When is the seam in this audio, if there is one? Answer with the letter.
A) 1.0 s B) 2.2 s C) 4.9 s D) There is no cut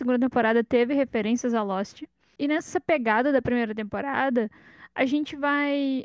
D